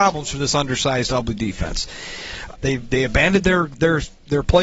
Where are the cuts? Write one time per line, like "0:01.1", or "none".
0:02.6

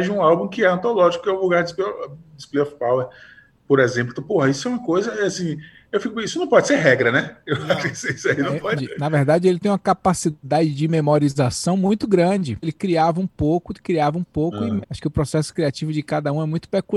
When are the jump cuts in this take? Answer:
0:08.8
0:12.6
0:14.8

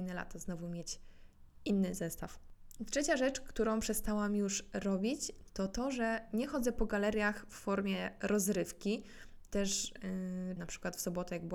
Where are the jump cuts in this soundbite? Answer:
0:09.5
0:10.6

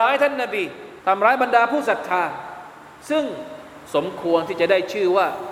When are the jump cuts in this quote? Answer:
0:01.0
0:03.8

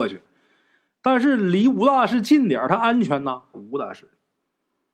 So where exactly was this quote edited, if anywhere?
0:03.5

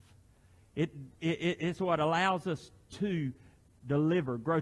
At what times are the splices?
none

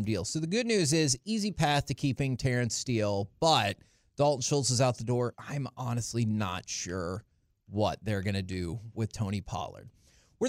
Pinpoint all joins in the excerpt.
0:05.3

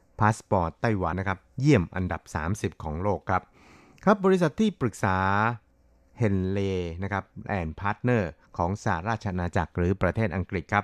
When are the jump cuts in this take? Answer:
0:01.1

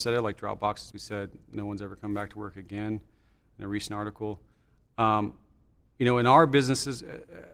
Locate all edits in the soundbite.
0:00.9

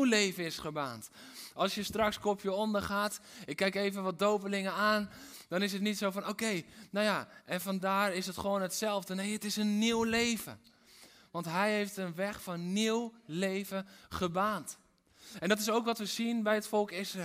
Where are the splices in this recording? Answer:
none

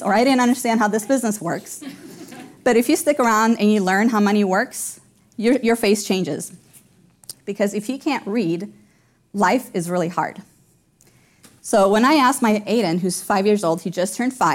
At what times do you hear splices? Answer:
0:07.3
0:12.7

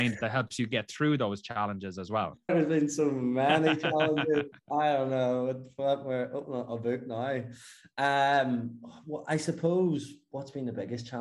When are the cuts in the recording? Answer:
0:02.5

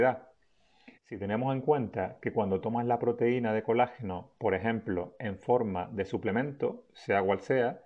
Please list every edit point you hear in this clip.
0:00.9

